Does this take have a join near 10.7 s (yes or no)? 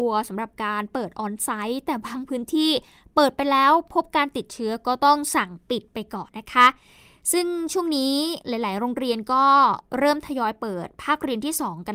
no